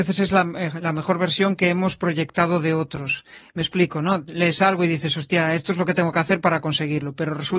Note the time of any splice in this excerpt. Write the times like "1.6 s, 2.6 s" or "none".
none